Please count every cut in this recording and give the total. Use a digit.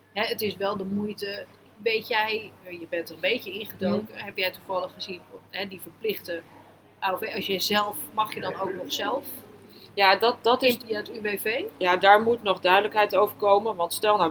1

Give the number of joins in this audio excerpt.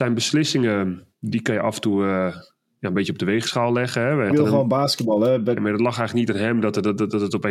2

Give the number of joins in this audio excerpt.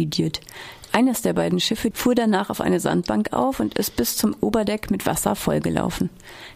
1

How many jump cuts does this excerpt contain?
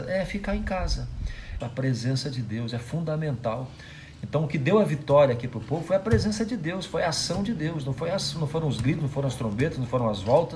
1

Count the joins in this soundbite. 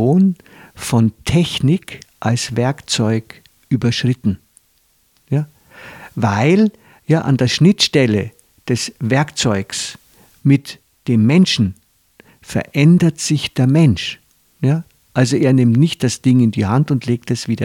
0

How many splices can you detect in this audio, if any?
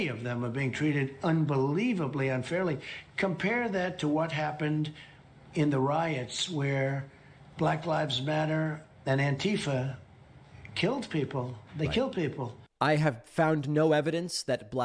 0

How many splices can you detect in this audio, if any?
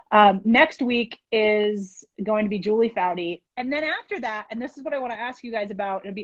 1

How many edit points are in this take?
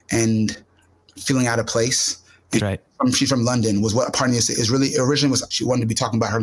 2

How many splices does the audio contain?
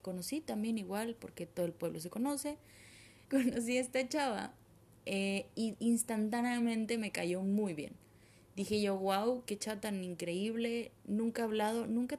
2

